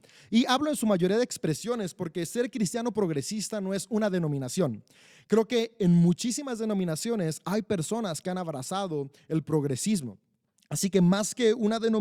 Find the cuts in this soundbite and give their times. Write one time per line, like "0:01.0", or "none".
none